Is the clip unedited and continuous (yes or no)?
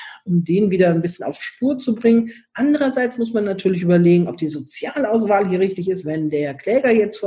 yes